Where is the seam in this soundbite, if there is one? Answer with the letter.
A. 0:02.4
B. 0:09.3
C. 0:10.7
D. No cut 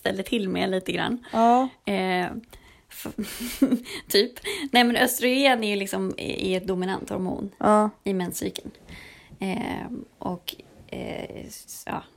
D